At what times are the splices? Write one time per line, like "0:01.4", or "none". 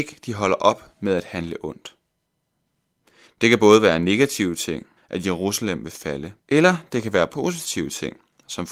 0:03.3
0:05.0
0:06.4